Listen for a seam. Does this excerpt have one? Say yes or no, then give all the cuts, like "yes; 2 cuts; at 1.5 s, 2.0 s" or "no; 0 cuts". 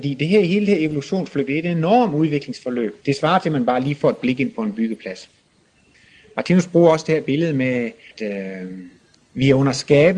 yes; 1 cut; at 3.0 s